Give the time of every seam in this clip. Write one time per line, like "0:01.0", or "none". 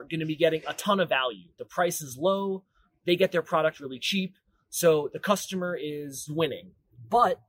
none

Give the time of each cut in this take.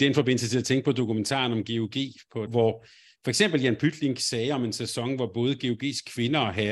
0:02.5

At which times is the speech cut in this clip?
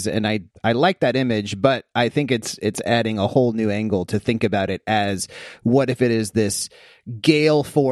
none

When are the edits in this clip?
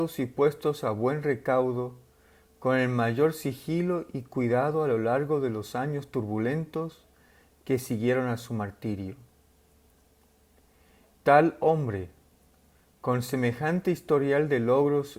0:11.1

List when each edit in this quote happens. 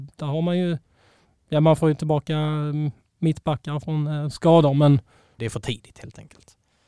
0:05.4

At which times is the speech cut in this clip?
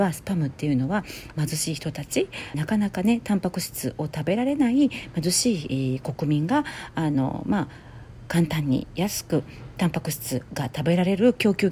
0:01.3
0:02.5

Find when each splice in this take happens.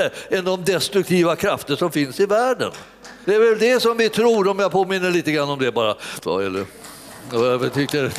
0:03.2
0:06.2

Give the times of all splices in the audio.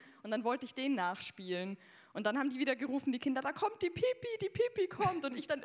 none

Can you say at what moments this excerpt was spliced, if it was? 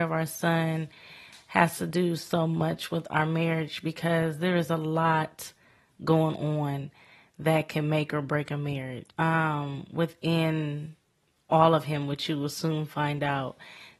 0:09.1

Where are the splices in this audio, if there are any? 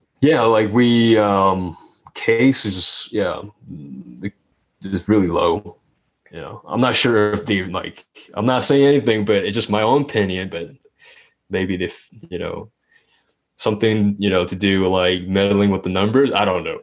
none

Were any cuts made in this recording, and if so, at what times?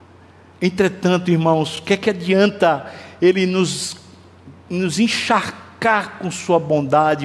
none

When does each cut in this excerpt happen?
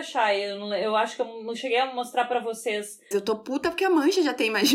0:03.1

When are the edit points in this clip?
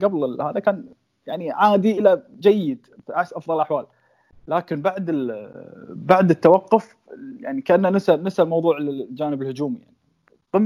none

